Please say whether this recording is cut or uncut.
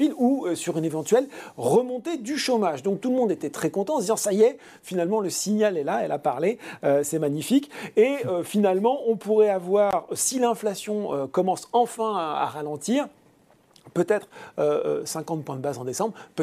uncut